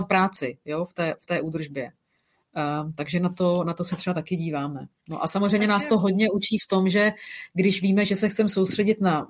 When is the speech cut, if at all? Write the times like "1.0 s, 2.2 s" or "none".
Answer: none